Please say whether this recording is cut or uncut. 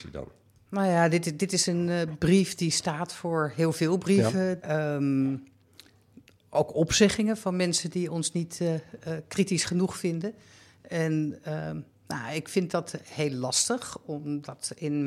cut